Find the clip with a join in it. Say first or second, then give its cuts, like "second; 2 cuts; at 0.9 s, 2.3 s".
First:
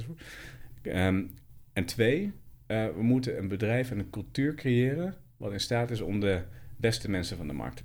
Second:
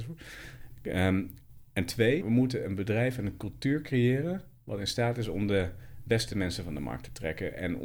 second; 1 cut; at 2.2 s